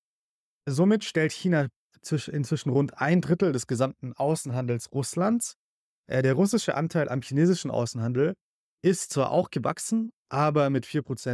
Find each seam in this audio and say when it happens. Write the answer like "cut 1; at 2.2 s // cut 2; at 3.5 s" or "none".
none